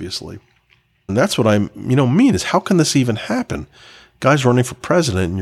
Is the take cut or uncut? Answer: cut